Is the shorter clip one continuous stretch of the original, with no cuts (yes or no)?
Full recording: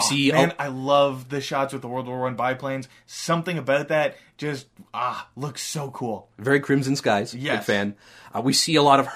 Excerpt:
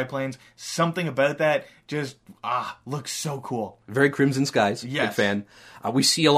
yes